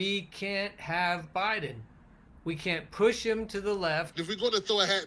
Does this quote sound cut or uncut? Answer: cut